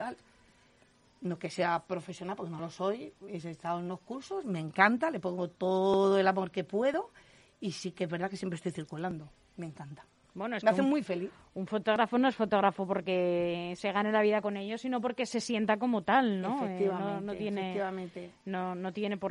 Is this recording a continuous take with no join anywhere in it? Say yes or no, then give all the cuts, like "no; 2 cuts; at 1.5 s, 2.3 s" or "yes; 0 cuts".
yes; 0 cuts